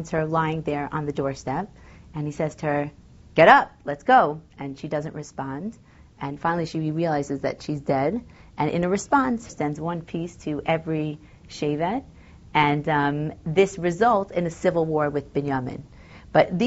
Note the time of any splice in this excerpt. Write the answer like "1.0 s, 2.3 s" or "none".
4.5 s, 9.5 s

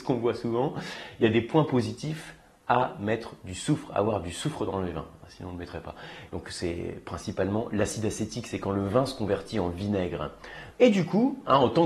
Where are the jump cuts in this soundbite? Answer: 6.3 s, 10.7 s

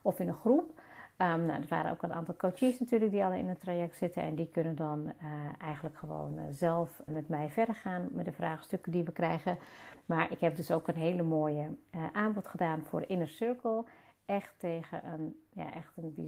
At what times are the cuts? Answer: 7.1 s

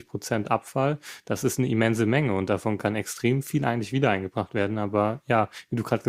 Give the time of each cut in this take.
none

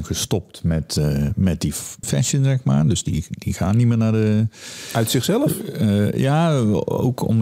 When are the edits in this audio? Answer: 2.0 s

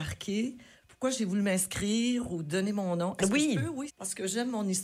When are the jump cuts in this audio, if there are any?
3.9 s

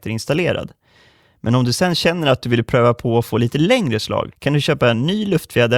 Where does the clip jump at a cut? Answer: 4.3 s

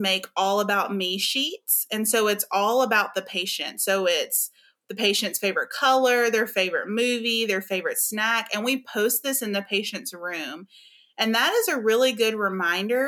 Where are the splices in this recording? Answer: none

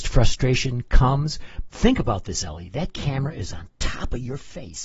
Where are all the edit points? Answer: 1.7 s

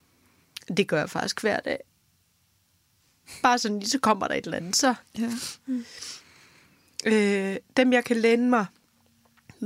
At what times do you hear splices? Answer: 5.6 s

